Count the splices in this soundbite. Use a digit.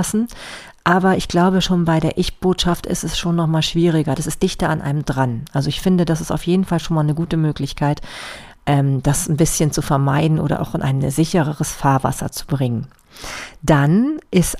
1